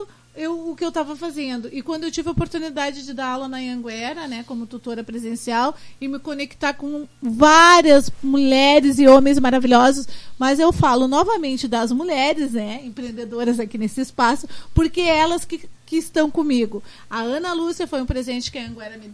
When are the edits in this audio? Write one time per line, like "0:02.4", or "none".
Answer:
none